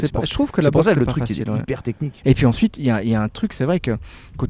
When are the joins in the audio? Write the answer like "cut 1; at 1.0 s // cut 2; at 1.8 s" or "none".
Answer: cut 1; at 2.2 s